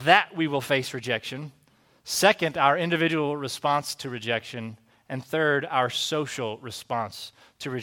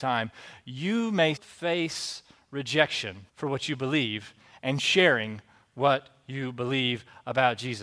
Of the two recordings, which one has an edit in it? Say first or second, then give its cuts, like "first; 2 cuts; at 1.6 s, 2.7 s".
second; 2 cuts; at 1.3 s, 3.3 s